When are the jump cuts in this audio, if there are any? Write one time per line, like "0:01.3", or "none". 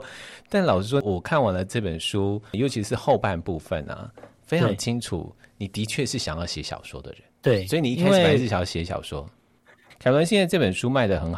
0:07.3
0:09.9